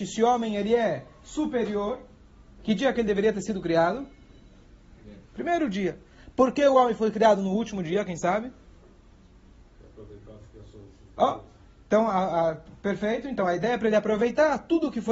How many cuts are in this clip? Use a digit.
1